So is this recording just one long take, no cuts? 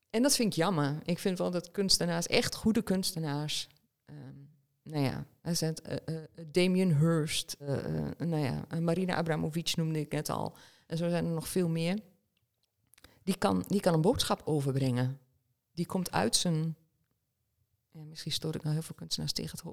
no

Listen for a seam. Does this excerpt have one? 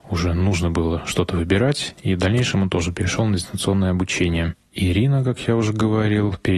yes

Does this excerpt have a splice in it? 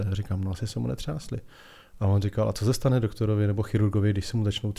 no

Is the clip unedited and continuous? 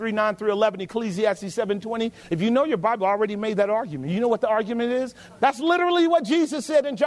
no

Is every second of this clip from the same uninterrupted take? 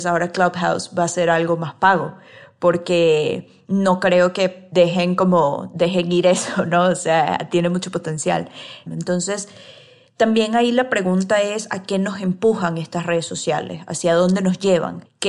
no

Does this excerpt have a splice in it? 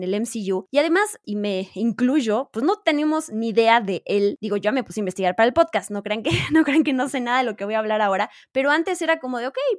yes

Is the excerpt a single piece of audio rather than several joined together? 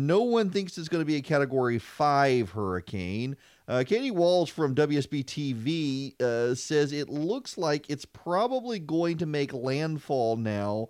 yes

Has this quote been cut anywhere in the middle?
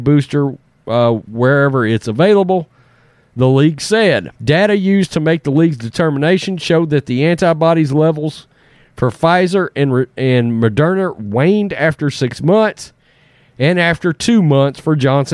yes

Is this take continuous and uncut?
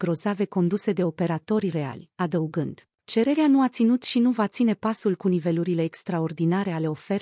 no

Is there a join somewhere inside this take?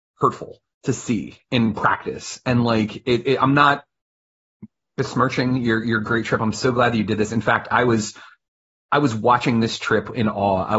no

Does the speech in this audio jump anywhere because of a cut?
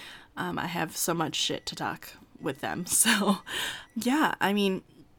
yes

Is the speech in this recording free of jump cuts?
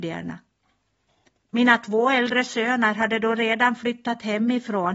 yes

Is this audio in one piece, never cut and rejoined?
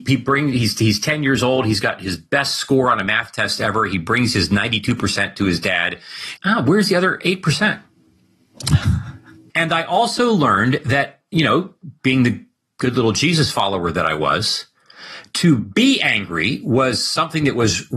no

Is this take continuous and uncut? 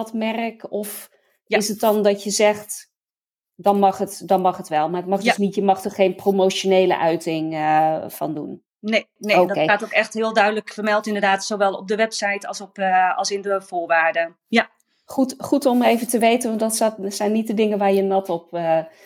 no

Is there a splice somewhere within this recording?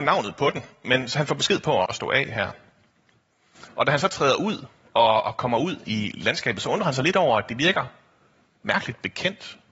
yes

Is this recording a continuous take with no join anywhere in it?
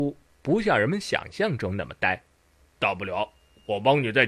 no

